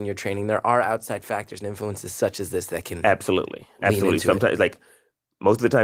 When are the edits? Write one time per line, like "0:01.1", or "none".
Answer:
none